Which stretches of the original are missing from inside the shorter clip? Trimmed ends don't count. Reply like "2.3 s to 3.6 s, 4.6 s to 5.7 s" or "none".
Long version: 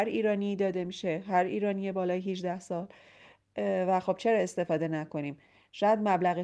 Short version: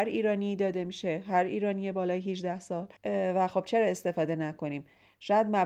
3.0 s to 3.5 s